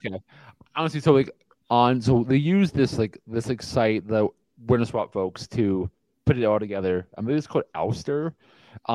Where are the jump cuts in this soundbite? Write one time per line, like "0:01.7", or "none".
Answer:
none